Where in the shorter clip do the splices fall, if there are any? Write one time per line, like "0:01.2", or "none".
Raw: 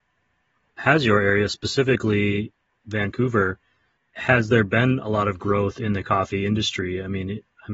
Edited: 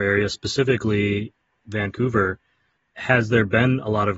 none